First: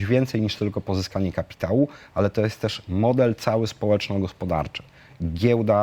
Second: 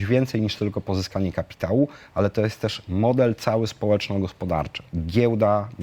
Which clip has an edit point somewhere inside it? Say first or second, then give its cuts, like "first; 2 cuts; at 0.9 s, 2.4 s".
second; 1 cut; at 4.9 s